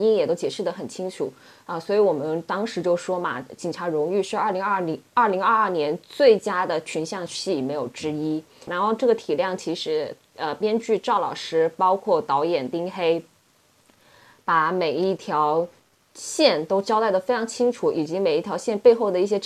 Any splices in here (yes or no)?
yes